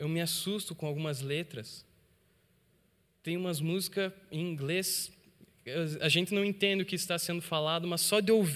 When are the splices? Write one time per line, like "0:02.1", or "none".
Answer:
none